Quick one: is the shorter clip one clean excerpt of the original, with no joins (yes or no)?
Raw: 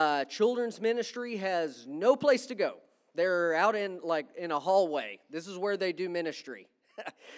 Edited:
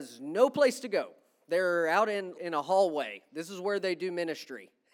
no